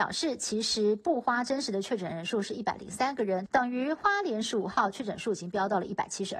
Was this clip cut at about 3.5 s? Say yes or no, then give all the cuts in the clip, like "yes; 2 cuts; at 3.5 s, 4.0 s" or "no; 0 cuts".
yes; 1 cut; at 3.5 s